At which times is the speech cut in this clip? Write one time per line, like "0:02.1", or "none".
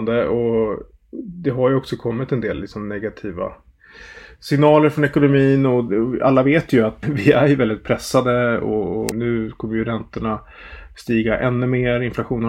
0:07.0
0:09.1